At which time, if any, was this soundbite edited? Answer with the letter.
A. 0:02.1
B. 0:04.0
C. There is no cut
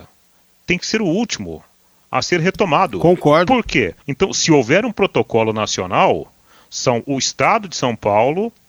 B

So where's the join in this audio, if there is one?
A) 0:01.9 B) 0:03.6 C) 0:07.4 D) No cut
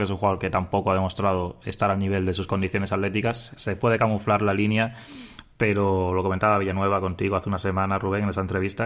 B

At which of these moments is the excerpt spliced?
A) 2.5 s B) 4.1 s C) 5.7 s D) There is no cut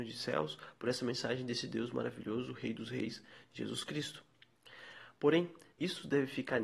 C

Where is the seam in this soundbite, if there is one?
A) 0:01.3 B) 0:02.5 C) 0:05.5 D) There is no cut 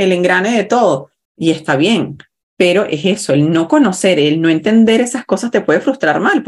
A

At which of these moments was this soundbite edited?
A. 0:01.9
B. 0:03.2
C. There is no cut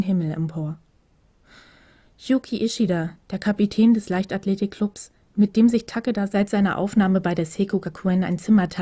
C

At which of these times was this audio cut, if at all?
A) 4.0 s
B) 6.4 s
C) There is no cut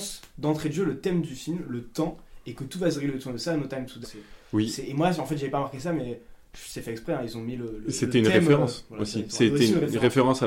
A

